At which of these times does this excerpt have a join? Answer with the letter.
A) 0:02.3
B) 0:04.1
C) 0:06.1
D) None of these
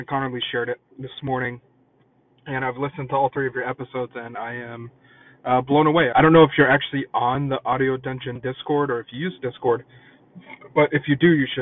C